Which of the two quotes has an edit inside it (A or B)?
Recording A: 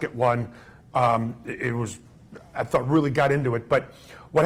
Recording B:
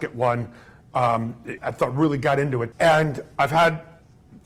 B